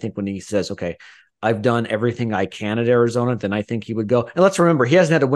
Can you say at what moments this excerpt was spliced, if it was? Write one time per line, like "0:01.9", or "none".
none